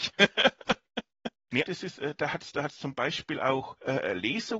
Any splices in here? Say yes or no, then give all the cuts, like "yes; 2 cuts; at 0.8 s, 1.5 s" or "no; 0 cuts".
yes; 1 cut; at 1.6 s